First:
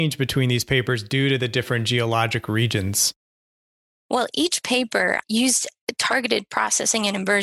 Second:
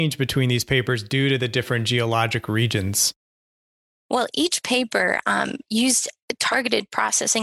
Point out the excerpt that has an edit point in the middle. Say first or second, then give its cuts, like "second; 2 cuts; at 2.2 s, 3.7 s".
first; 1 cut; at 5.2 s